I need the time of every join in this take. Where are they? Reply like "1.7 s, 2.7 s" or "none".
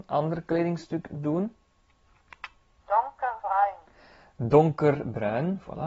none